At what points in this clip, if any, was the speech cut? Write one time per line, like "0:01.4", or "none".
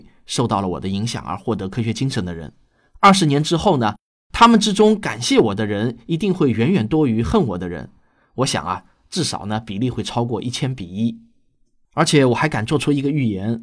none